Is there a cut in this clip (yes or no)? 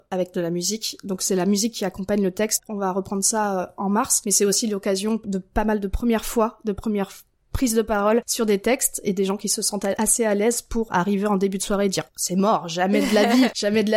yes